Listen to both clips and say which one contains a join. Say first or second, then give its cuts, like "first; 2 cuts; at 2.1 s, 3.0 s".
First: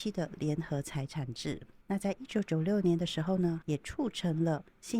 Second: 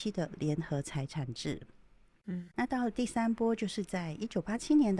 first; 2 cuts; at 1.8 s, 3.6 s